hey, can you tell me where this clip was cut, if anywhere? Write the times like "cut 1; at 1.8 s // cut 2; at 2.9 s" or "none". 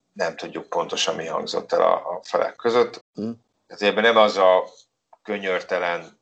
cut 1; at 3.0 s